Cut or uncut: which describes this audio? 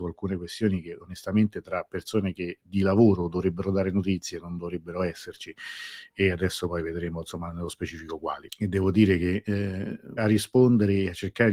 cut